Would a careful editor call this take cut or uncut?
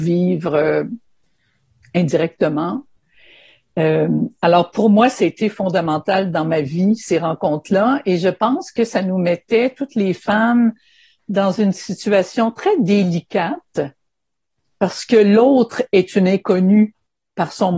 uncut